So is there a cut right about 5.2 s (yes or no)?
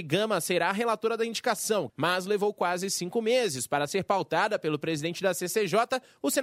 no